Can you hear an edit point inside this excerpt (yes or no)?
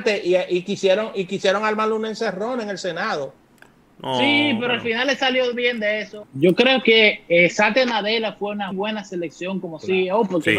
yes